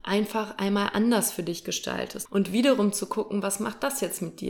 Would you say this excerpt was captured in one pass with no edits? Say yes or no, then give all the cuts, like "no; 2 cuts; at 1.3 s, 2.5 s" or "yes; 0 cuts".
no; 1 cut; at 2.2 s